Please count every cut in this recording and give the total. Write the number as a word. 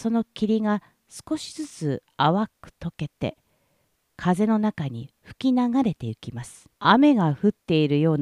one